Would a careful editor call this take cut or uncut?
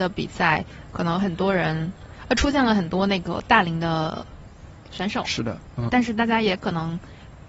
cut